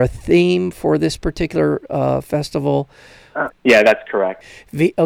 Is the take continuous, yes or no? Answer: no